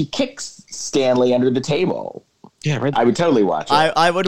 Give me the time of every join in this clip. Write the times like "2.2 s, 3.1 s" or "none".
2.9 s